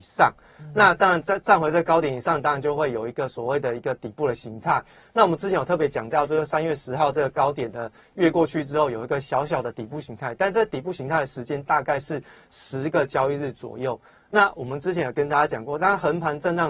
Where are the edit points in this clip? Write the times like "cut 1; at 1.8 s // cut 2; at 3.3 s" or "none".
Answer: none